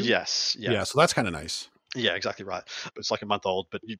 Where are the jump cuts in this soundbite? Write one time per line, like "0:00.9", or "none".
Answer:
0:02.9